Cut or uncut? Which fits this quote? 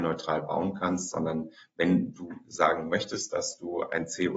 uncut